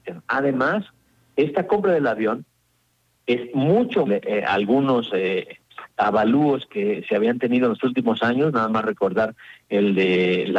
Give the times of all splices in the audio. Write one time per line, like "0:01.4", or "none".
0:04.1

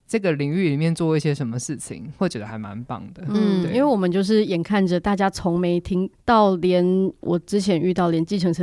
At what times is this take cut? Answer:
0:06.1

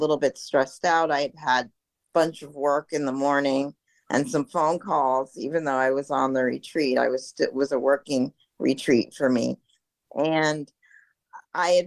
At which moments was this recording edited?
0:10.1

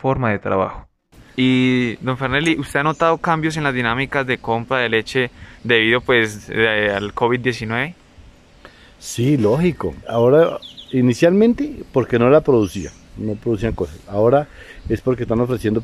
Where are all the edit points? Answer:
0:10.0

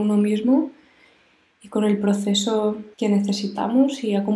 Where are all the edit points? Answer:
0:02.9

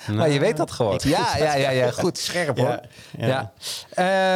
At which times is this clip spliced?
0:01.0

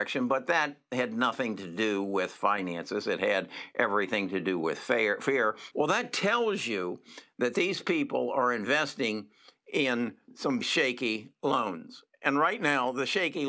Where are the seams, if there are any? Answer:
0:05.7
0:10.6

